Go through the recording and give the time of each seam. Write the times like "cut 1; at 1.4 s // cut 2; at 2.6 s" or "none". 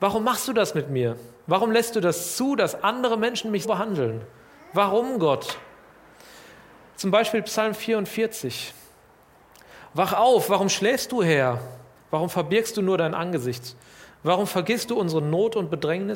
cut 1; at 3.6 s // cut 2; at 12.0 s